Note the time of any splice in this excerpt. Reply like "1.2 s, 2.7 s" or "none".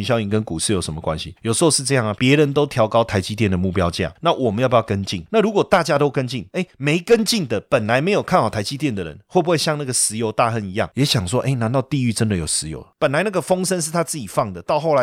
2.2 s